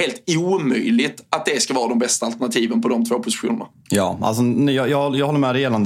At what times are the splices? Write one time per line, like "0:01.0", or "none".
none